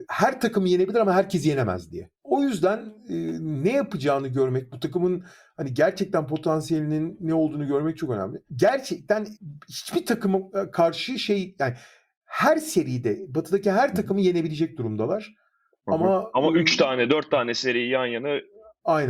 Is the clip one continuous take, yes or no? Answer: yes